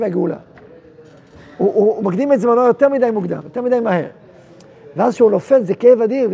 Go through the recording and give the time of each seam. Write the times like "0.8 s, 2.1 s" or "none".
none

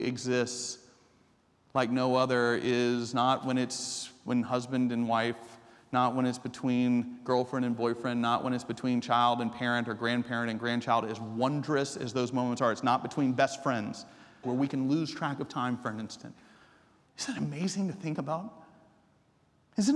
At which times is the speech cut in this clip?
14.4 s, 17.1 s

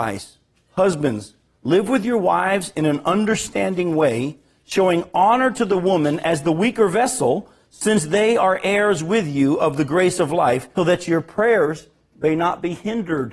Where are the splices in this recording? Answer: 10.8 s

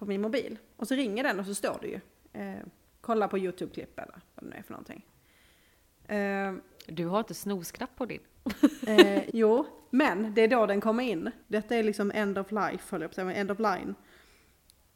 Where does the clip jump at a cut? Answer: 9.3 s, 11.4 s

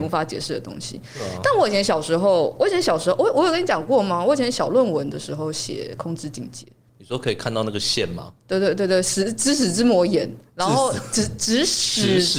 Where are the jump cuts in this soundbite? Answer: none

